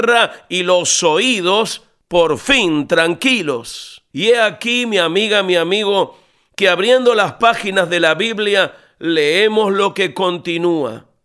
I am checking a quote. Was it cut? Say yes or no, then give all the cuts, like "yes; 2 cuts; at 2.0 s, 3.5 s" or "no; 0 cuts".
yes; 1 cut; at 4.1 s